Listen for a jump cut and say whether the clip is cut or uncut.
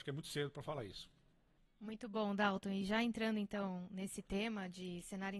uncut